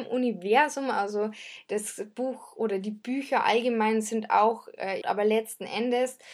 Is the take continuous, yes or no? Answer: no